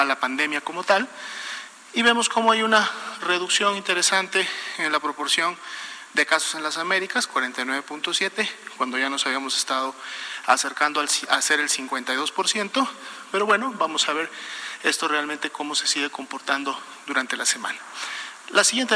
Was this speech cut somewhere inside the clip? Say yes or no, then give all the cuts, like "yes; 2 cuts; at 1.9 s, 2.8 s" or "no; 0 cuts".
no; 0 cuts